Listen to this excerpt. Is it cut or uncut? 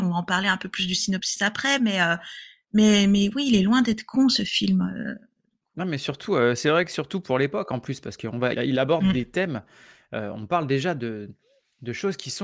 cut